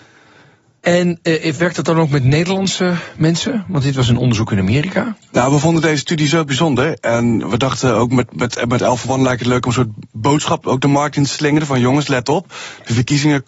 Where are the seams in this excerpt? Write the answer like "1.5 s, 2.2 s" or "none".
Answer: none